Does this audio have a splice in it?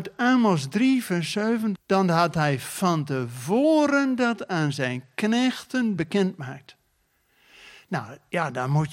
yes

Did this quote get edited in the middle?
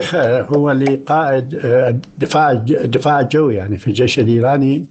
no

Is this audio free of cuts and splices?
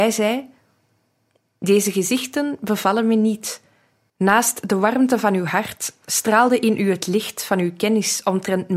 no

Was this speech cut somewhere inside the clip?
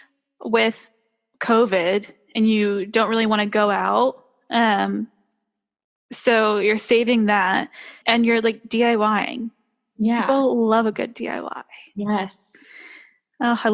yes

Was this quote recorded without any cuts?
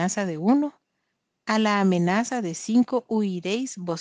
yes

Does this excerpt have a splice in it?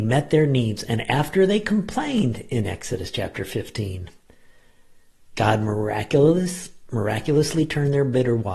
no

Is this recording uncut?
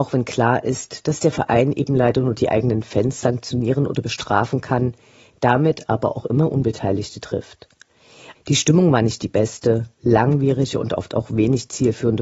no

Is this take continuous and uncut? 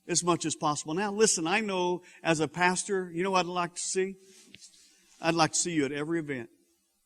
yes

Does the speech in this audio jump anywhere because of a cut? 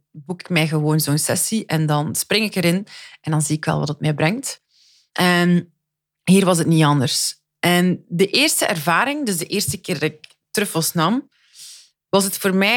no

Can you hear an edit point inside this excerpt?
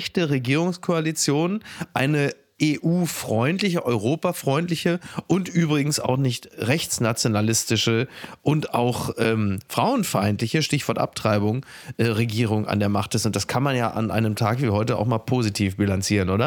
no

